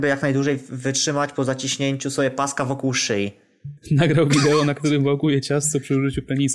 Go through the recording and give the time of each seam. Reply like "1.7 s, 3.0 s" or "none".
3.8 s

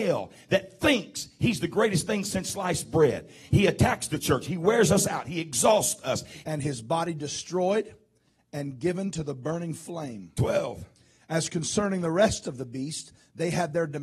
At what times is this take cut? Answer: 6.4 s

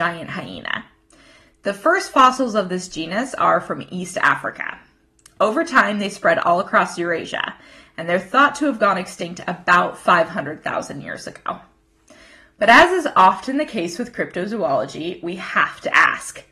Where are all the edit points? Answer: none

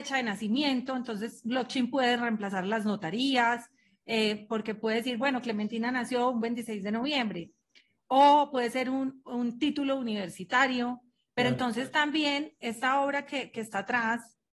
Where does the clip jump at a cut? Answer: none

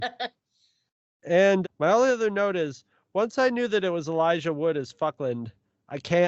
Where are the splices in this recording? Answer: 1.6 s

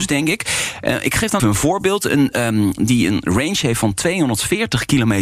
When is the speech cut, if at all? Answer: 1.4 s, 2.8 s

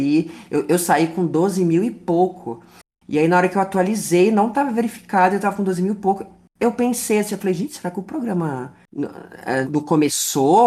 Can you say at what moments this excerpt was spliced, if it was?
9.6 s

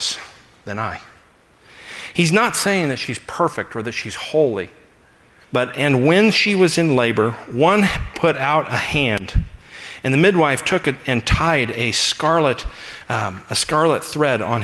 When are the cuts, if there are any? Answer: 5.4 s

